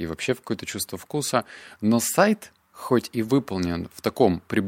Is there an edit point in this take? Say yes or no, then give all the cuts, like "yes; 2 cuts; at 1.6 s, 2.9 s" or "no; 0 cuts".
no; 0 cuts